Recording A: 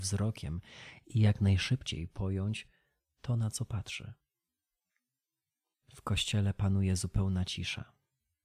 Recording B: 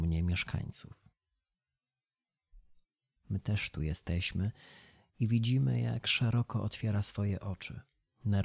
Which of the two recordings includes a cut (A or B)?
B